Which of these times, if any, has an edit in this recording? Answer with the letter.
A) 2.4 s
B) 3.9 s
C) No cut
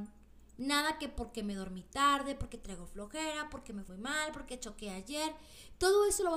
B